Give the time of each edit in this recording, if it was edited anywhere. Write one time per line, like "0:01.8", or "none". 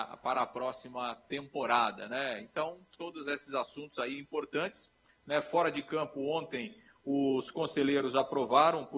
none